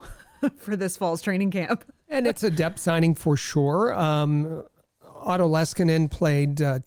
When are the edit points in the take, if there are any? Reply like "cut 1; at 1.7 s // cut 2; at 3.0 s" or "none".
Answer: none